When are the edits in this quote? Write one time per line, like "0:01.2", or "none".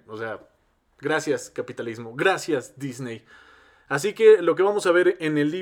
none